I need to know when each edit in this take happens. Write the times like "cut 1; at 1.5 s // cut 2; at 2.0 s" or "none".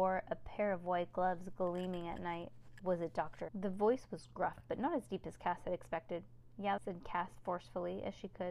cut 1; at 3.5 s // cut 2; at 6.8 s